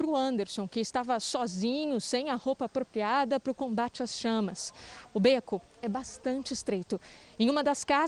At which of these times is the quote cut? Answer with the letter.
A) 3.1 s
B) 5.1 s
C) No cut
C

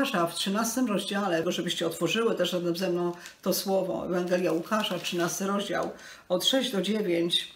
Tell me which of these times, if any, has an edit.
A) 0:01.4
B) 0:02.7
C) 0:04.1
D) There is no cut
A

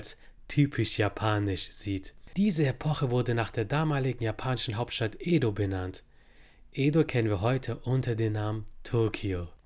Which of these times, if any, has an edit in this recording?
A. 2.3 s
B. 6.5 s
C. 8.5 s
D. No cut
D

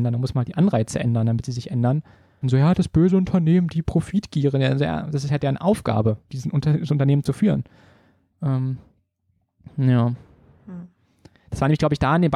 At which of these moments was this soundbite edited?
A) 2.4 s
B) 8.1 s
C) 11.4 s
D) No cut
A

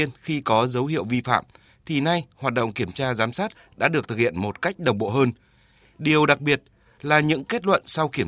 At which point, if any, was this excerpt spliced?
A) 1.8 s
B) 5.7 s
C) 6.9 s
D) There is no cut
D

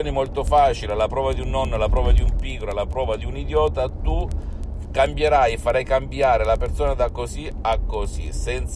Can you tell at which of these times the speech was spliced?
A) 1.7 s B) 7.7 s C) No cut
C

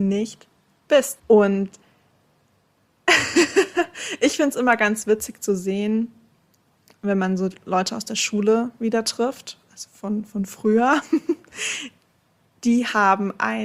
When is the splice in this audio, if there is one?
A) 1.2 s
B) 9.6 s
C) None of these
A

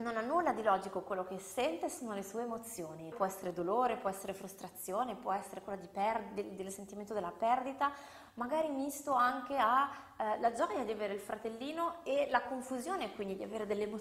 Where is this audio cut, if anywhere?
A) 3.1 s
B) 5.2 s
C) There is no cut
A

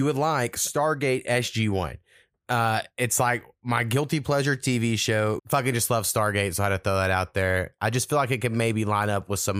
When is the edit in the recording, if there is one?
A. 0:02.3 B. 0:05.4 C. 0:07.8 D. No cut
B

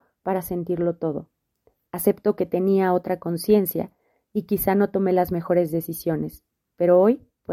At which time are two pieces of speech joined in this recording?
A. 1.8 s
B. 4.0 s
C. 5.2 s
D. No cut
A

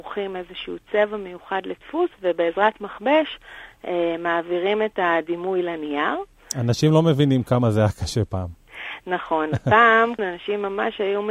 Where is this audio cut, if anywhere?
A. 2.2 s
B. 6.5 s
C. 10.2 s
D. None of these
C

